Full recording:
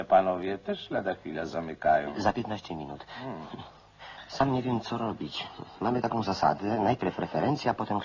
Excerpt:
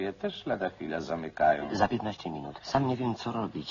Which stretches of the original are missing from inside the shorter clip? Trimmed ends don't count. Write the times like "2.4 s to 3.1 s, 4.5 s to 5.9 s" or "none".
3.0 s to 4.3 s